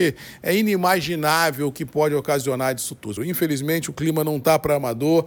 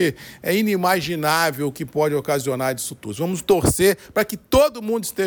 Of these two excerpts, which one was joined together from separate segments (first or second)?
first